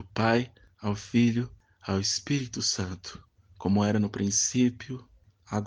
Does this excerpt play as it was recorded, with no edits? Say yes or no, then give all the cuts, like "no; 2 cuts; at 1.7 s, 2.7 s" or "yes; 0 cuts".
yes; 0 cuts